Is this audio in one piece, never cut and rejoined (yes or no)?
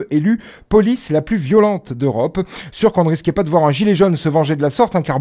yes